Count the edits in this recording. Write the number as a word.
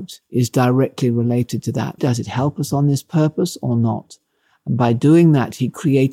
one